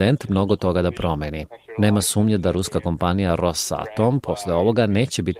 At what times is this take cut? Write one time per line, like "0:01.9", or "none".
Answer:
none